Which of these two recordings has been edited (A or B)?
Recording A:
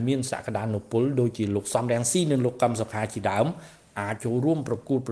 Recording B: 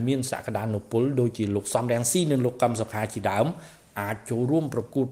A